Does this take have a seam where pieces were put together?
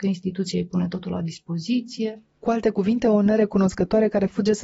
no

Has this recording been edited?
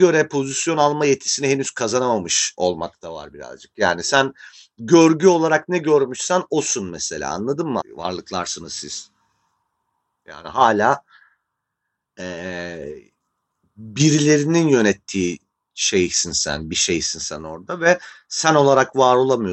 yes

